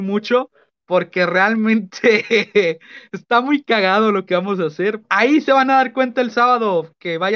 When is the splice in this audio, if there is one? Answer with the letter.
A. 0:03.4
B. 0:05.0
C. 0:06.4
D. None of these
B